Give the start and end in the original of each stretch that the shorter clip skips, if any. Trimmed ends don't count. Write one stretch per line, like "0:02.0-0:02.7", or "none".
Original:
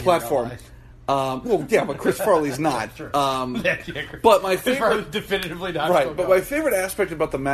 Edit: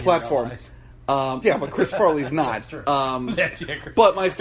0:01.4-0:01.7